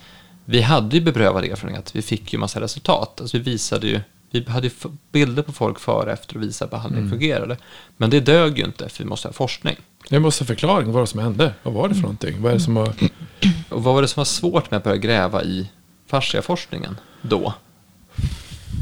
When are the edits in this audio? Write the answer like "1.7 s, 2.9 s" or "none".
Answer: 13.7 s